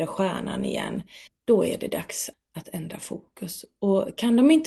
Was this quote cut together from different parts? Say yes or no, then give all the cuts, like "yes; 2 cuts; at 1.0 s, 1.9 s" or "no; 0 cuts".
yes; 2 cuts; at 1.3 s, 2.3 s